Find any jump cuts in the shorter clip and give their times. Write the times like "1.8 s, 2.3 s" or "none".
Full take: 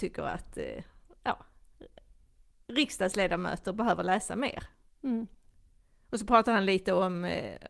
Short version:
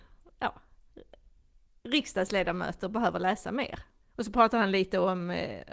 4.0 s